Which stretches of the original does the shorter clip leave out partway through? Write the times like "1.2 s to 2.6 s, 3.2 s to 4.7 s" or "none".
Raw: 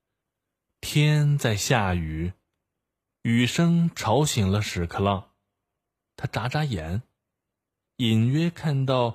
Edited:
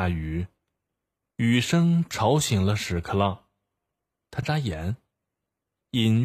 6.3 s to 6.5 s